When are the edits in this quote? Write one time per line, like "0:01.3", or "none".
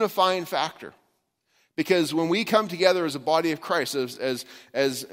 none